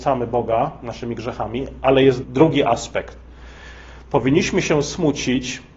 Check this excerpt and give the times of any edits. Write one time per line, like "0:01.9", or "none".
0:02.2